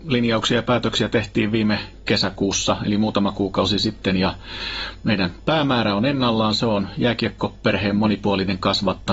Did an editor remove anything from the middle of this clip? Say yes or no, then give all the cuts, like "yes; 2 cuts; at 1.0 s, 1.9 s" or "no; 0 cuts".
no; 0 cuts